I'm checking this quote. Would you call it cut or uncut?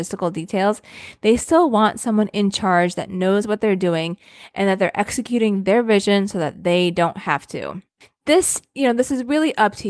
uncut